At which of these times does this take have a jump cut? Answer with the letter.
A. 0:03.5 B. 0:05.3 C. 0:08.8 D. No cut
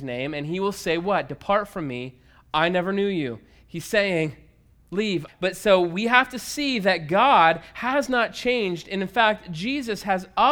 B